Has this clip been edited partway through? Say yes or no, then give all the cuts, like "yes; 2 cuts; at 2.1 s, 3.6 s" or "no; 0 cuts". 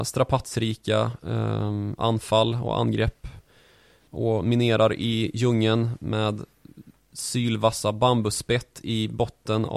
no; 0 cuts